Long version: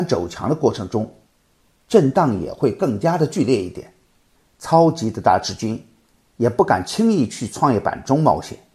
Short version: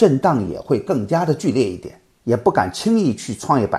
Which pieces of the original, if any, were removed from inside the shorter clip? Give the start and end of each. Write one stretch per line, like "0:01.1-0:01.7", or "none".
0:04.1-0:06.3